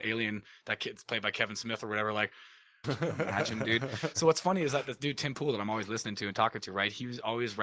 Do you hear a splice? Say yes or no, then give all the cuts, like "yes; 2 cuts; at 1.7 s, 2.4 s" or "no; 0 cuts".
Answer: yes; 1 cut; at 2.8 s